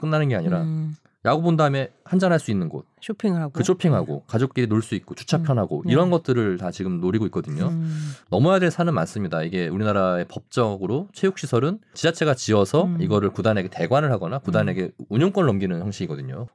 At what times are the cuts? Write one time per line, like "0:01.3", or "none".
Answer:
none